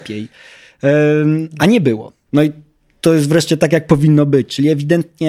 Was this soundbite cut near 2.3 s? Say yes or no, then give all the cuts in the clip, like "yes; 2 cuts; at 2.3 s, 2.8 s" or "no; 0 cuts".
yes; 1 cut; at 2.3 s